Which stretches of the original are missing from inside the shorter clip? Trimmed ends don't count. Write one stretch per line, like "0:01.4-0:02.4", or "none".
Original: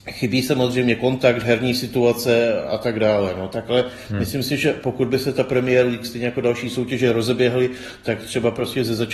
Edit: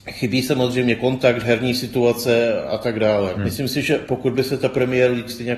0:03.3-0:04.1